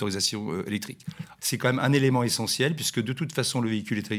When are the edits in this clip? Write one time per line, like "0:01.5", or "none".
0:01.4